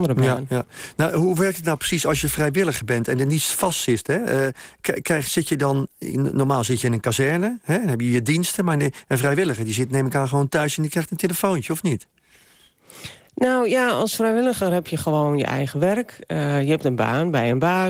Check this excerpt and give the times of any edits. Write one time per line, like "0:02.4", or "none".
none